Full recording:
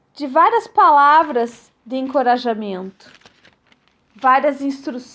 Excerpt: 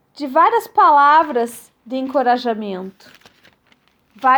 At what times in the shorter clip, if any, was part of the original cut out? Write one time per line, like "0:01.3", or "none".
none